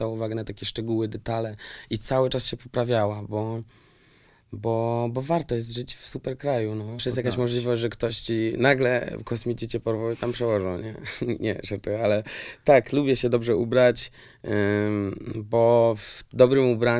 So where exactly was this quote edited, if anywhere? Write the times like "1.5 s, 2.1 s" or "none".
7.0 s